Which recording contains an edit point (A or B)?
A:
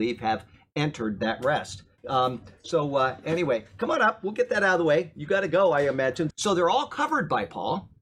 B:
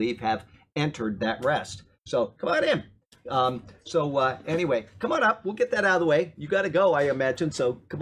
A